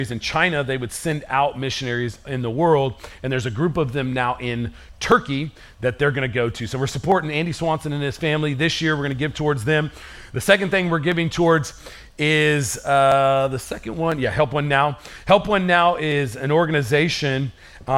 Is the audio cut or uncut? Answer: uncut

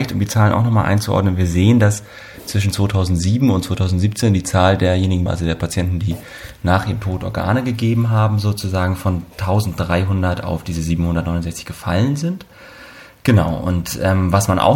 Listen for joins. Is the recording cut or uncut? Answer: cut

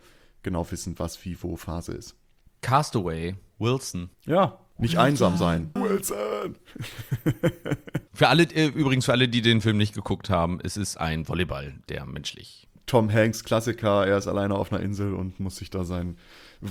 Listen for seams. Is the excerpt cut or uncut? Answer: cut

